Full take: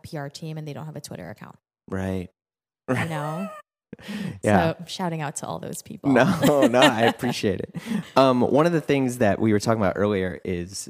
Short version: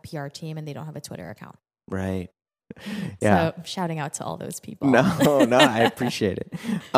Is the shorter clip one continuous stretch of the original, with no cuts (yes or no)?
no